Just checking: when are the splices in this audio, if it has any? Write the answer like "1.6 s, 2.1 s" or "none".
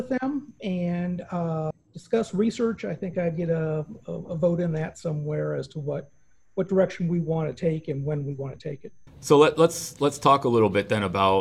1.7 s, 9.1 s

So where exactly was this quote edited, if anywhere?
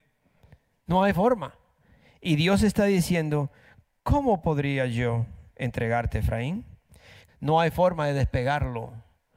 7.3 s

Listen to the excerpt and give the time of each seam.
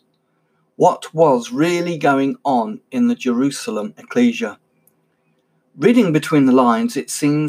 none

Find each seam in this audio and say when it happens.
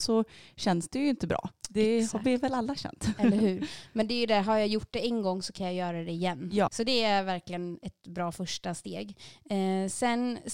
6.7 s

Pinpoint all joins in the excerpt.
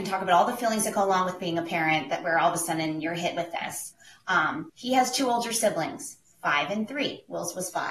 4.7 s

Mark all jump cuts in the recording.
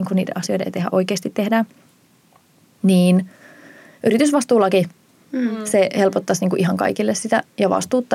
none

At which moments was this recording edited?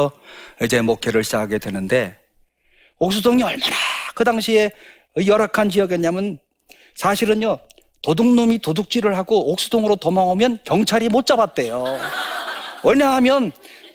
none

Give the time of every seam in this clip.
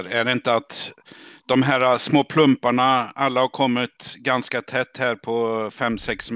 none

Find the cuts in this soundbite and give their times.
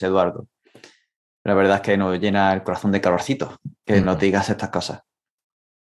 none

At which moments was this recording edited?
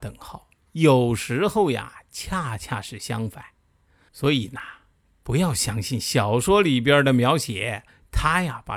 4.1 s

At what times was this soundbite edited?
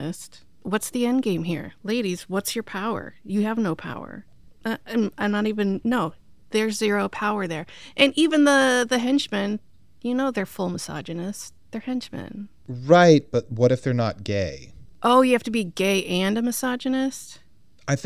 4.5 s

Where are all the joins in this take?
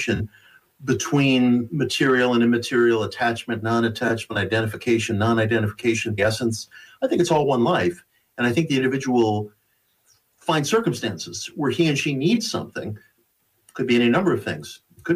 6.2 s

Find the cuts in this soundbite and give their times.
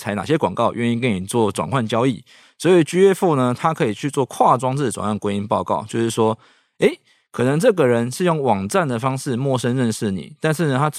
2.4 s

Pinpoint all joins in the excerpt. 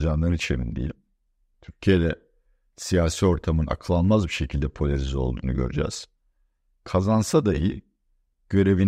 none

